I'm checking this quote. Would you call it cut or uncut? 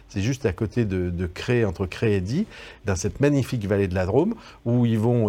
uncut